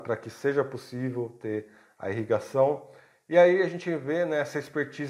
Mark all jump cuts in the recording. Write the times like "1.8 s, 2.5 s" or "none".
none